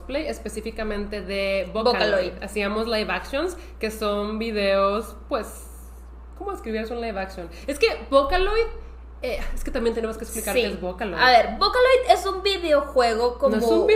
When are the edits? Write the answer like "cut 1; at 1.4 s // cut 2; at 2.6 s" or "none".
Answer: none